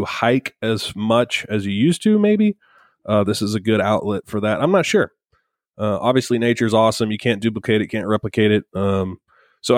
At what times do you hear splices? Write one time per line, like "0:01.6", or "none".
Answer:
0:08.7